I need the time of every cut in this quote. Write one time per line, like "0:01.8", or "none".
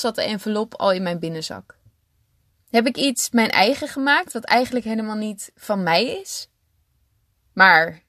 0:02.5